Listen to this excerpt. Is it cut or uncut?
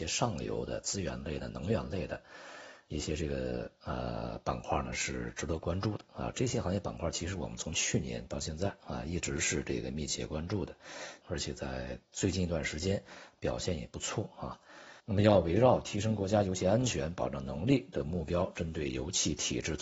cut